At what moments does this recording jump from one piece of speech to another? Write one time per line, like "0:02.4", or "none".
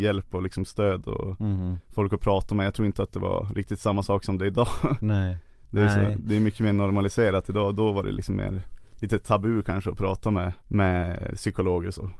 0:10.6